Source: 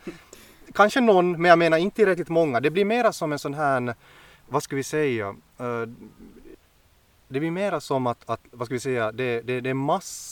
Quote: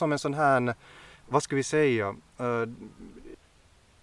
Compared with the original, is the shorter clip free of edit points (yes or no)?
yes